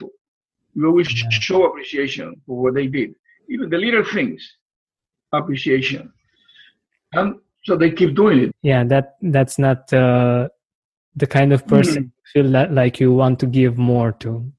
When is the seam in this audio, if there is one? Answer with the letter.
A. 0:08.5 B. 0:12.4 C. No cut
A